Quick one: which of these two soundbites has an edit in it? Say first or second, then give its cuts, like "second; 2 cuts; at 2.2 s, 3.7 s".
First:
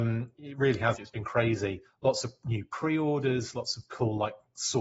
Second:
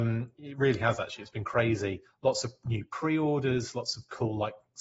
first; 1 cut; at 1.0 s